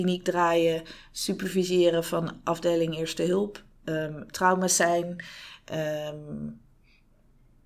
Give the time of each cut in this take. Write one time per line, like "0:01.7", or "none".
0:04.3